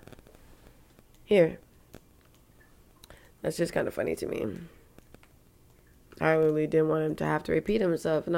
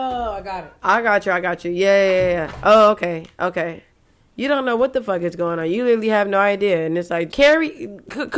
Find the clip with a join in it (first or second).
second